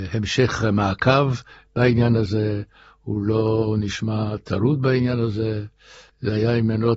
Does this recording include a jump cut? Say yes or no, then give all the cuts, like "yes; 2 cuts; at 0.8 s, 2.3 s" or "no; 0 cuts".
no; 0 cuts